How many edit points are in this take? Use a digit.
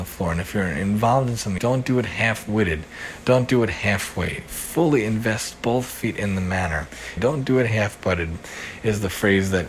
2